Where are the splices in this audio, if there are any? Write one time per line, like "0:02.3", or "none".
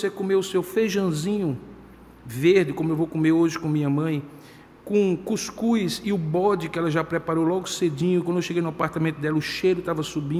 none